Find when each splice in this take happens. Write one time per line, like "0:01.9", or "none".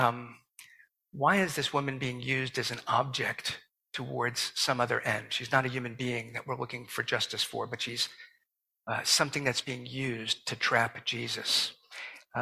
none